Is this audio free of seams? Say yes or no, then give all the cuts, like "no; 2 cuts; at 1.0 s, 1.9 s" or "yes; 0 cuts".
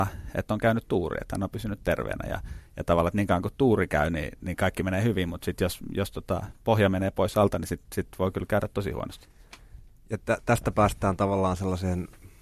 yes; 0 cuts